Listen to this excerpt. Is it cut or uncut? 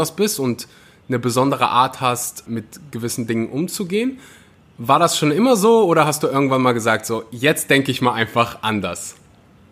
cut